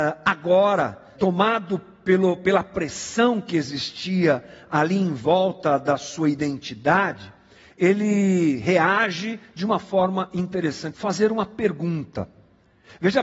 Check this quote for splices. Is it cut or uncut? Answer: cut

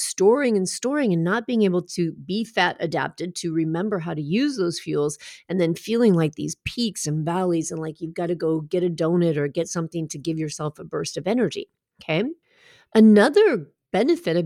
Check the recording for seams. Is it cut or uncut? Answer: uncut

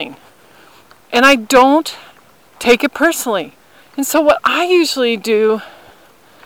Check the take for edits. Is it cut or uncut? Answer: cut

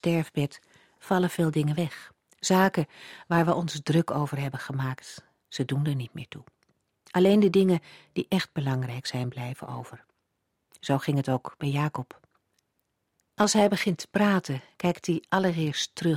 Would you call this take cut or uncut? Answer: uncut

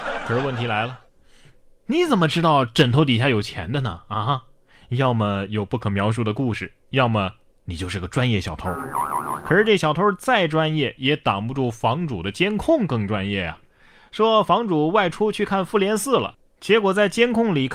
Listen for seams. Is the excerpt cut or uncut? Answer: uncut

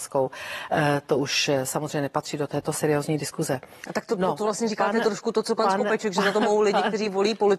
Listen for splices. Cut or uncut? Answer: uncut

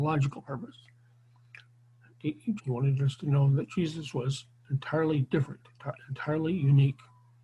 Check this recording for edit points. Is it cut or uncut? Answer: cut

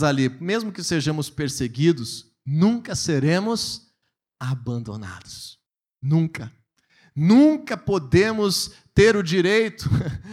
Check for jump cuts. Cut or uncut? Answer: uncut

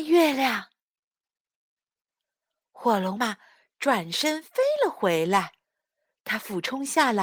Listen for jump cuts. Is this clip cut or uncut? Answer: cut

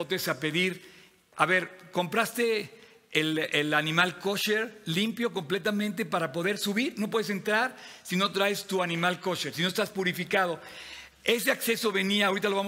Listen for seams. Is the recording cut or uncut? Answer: uncut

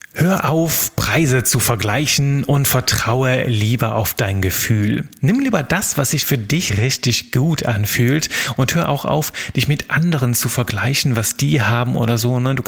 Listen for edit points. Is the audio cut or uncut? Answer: cut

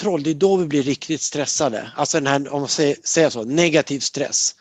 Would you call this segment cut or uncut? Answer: uncut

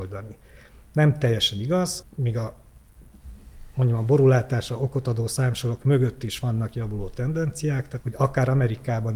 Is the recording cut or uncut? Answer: cut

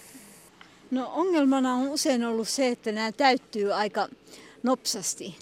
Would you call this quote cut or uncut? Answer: uncut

